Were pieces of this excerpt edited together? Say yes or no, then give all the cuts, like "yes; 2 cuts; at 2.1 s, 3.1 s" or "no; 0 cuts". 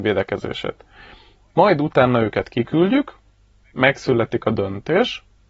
no; 0 cuts